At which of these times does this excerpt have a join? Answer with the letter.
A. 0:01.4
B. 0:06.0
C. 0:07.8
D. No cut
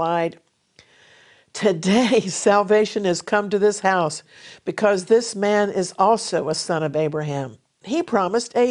C